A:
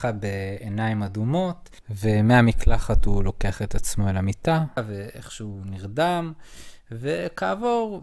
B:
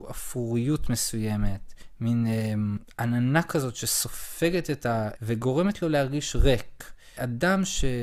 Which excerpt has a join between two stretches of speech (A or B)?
B